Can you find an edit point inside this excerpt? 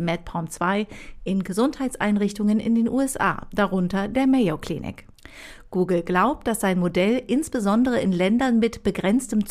no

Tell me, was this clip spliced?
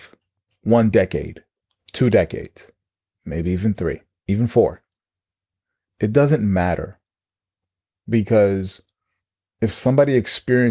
yes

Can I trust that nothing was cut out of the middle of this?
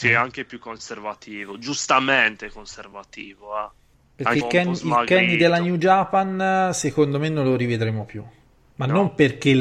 no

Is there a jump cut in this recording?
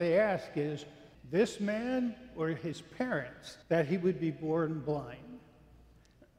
yes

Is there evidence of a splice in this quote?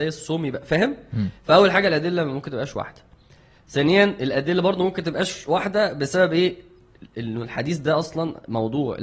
no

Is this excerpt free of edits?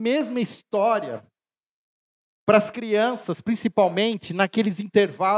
yes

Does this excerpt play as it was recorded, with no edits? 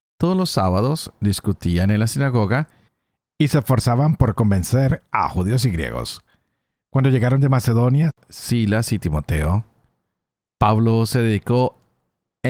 yes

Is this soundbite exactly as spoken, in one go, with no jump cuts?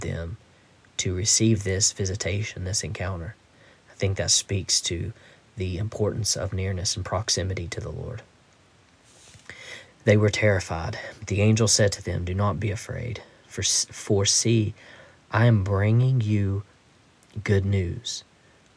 no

